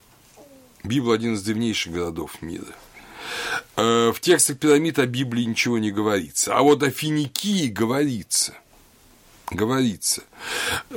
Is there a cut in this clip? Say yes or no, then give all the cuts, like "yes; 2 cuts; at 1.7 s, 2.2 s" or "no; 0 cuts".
no; 0 cuts